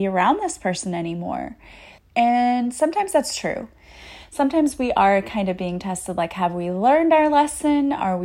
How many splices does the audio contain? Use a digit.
1